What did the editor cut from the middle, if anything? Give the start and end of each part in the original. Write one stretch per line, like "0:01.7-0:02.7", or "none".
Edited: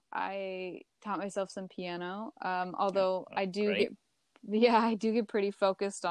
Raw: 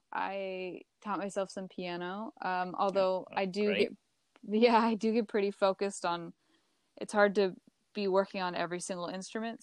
none